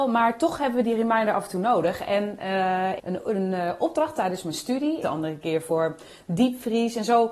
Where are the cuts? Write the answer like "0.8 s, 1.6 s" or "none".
3.0 s, 5.0 s

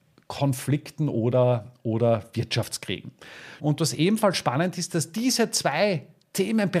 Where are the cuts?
3.6 s

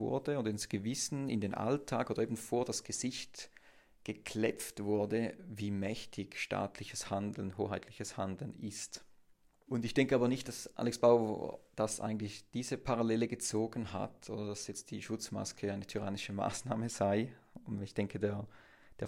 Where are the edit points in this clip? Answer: 9.7 s

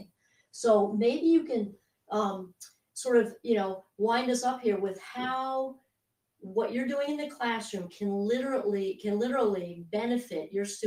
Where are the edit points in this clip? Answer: none

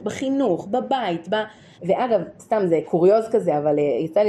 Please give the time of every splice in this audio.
1.7 s

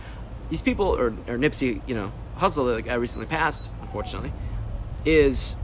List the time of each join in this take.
none

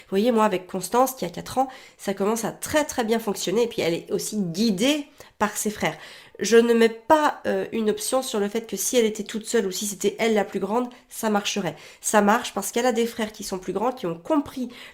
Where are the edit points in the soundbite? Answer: none

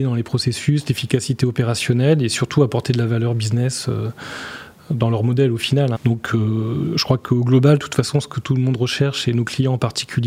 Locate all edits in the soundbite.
5.9 s

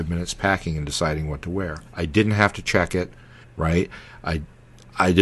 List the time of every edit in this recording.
1.9 s, 3.4 s

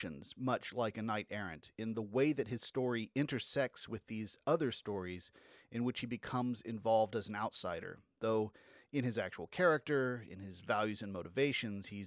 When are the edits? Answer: none

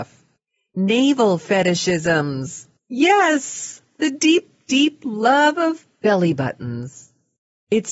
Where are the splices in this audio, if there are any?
none

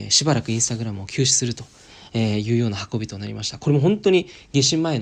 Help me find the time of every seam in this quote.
none

